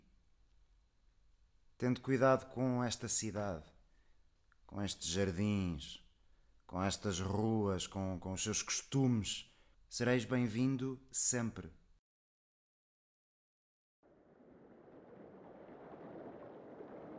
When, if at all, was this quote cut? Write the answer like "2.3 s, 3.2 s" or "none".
9.7 s